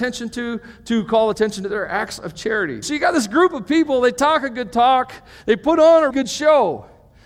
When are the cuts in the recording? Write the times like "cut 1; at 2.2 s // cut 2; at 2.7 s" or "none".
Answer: cut 1; at 2.8 s // cut 2; at 6.1 s